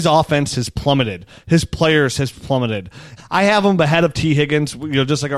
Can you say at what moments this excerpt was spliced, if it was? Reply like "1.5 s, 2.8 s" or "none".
3.2 s